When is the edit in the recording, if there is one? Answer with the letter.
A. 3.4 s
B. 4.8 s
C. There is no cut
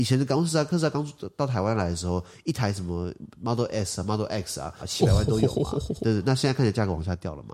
B